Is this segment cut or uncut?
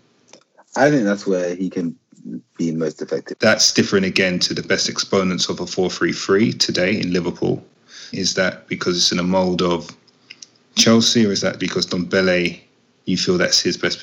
cut